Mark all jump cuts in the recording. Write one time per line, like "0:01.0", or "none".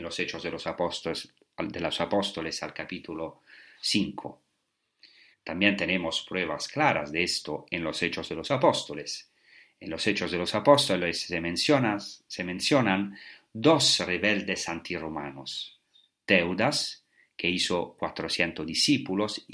0:05.3